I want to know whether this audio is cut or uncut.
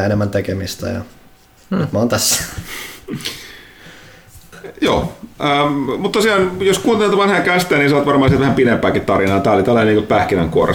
uncut